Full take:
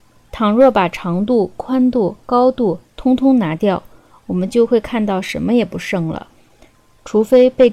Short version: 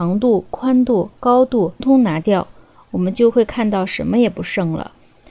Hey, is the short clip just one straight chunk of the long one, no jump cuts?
no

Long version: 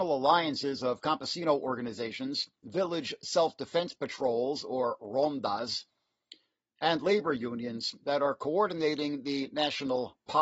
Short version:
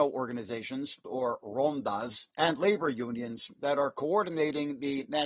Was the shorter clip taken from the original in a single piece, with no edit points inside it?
no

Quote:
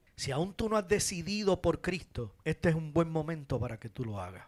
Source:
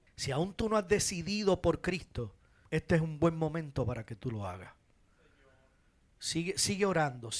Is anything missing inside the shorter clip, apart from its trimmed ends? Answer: yes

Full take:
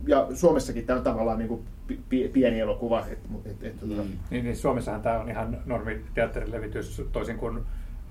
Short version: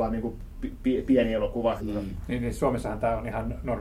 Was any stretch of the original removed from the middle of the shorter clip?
yes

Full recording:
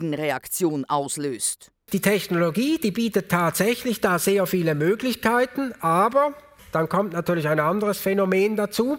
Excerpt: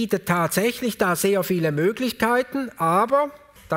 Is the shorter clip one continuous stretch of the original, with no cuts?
yes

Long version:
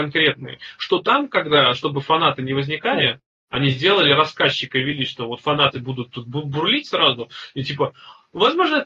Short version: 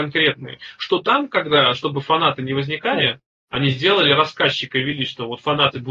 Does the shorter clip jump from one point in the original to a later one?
no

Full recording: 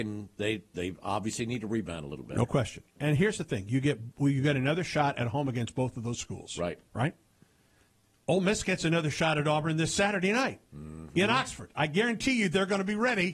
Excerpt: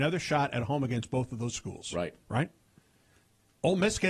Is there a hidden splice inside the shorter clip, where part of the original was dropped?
no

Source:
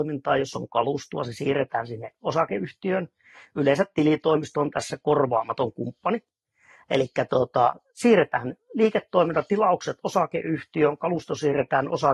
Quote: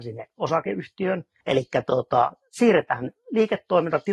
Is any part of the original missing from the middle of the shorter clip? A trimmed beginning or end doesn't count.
yes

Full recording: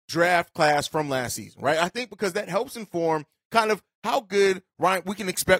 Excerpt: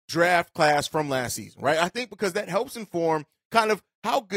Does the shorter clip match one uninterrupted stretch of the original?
yes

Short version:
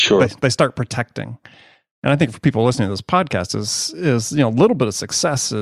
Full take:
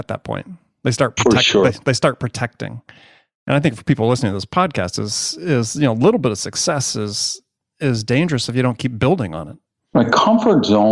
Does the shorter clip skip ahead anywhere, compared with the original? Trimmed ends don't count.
no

